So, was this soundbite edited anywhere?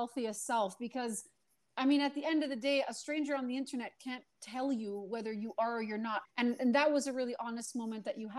yes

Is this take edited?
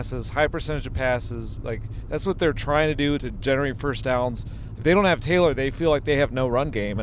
yes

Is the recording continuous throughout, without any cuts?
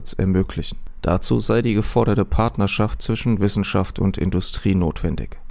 yes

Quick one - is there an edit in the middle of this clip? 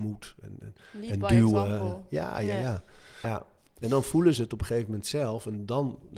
yes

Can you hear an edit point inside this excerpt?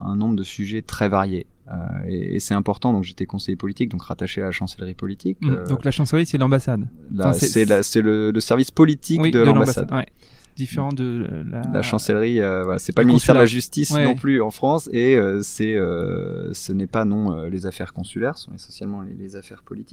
no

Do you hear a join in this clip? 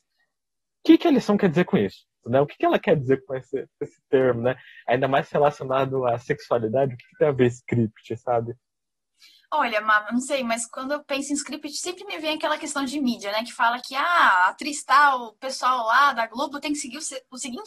yes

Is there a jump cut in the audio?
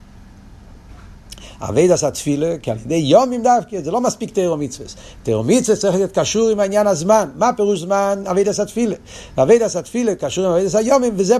no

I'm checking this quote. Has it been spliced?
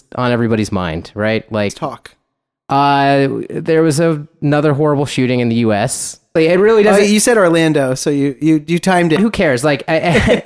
yes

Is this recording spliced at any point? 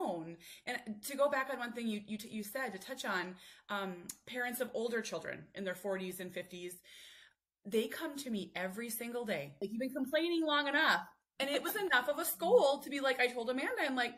yes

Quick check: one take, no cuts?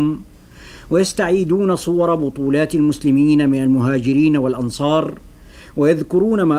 yes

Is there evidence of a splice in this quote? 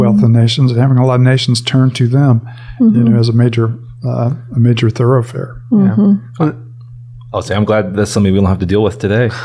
no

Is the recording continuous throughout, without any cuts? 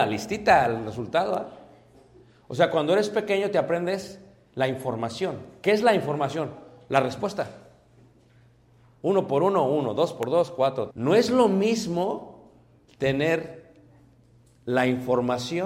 no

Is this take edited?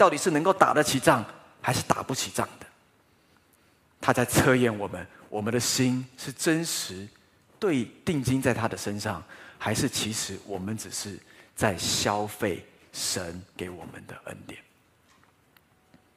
no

